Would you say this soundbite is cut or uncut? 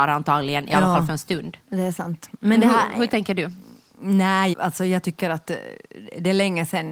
cut